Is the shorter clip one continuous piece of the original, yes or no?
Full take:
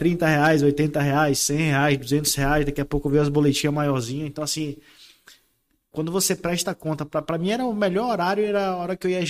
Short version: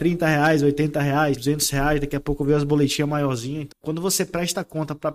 no